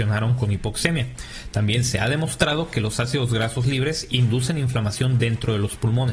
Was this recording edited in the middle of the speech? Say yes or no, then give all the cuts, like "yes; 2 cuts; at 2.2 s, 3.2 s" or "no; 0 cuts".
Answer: no; 0 cuts